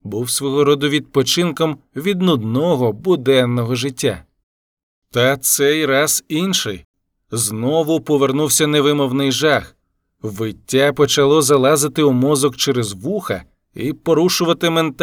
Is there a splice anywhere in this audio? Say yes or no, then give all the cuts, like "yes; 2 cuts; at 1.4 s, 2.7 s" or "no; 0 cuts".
no; 0 cuts